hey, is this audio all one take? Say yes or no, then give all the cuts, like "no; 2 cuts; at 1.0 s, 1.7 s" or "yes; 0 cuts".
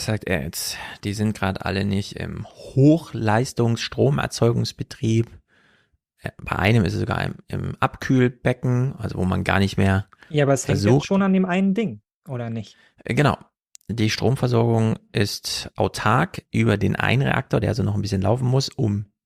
yes; 0 cuts